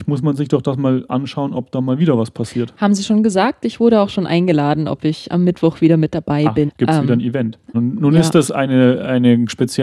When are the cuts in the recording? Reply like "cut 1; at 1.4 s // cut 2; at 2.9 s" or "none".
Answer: cut 1; at 6.7 s // cut 2; at 7.7 s